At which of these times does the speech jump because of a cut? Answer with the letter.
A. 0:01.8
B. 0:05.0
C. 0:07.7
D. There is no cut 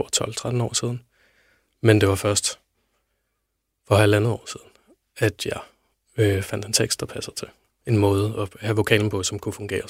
C